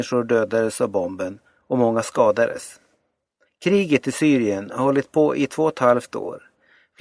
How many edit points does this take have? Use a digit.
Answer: 1